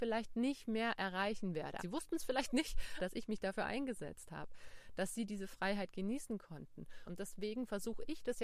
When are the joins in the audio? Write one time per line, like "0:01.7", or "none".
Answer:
0:01.8
0:03.0
0:07.1